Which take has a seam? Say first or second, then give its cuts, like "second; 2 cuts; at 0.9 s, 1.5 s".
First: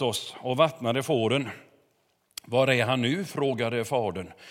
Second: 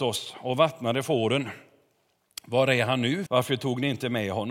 second; 1 cut; at 3.3 s